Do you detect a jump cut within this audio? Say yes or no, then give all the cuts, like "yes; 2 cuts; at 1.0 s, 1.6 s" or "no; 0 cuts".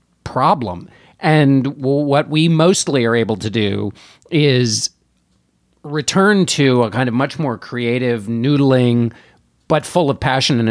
no; 0 cuts